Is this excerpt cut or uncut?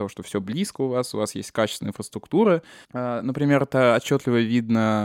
cut